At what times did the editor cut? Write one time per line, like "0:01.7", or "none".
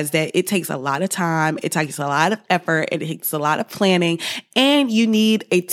none